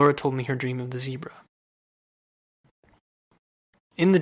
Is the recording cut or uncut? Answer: uncut